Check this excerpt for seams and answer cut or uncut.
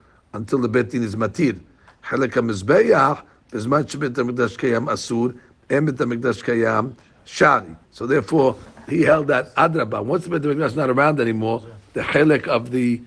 cut